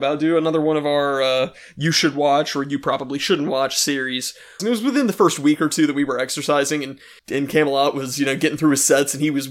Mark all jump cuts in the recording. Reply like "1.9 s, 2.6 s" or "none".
4.6 s, 7.2 s